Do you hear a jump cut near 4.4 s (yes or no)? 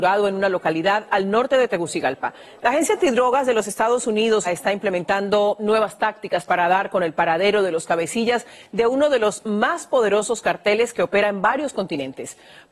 yes